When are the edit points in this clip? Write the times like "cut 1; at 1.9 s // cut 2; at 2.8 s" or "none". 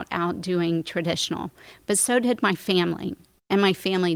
none